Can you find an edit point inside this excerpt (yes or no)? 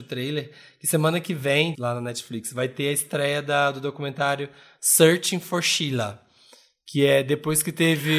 yes